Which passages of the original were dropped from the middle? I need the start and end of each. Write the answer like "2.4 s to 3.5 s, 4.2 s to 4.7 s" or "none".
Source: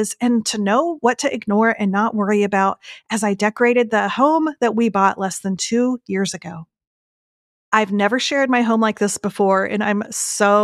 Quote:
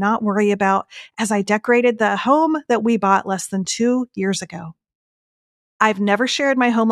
none